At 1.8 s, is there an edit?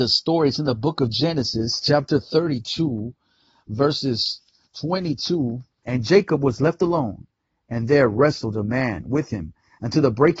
no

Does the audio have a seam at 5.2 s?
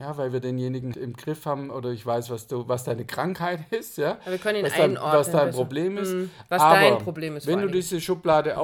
no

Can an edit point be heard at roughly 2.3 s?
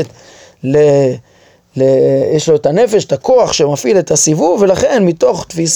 no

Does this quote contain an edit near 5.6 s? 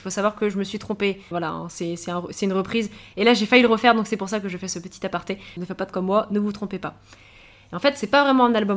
yes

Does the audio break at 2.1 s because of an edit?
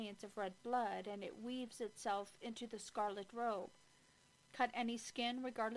no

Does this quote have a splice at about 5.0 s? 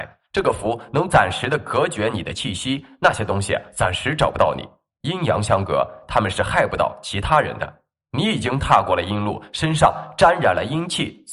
yes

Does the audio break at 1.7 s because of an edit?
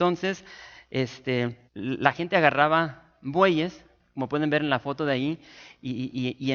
yes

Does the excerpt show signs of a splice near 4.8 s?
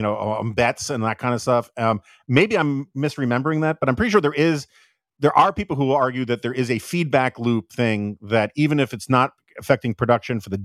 no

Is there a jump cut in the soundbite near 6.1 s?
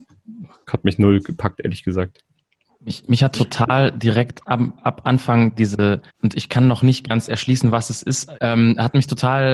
yes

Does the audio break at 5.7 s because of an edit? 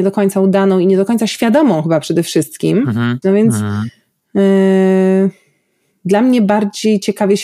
no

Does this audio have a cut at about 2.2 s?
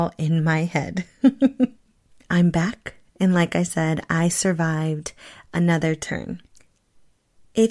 yes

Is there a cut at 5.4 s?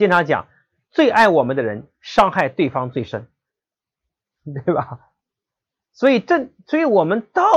no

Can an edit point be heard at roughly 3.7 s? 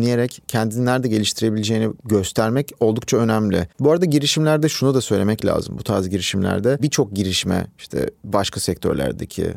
yes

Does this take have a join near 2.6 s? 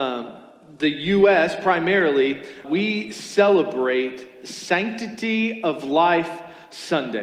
yes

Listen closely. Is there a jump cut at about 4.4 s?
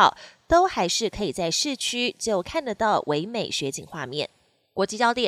no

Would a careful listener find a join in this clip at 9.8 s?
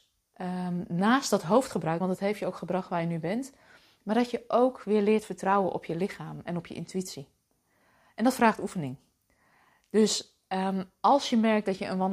no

